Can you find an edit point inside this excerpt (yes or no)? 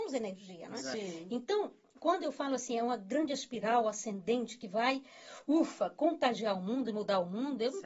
no